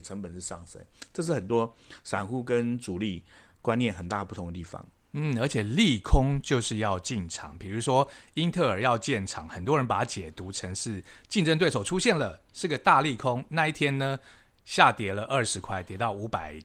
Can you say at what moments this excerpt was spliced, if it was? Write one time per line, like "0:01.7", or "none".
none